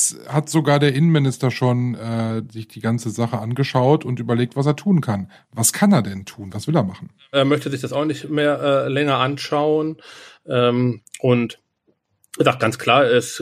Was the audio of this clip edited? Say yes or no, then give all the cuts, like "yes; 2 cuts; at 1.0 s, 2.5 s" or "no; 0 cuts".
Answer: yes; 1 cut; at 10.4 s